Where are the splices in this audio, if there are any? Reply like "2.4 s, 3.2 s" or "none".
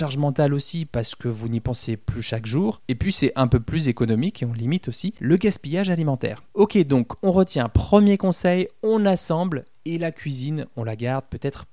6.5 s